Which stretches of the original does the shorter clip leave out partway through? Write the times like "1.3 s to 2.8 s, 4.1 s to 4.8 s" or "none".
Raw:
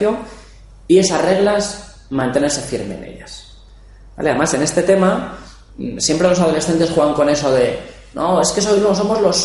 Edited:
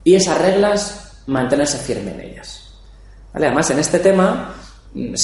none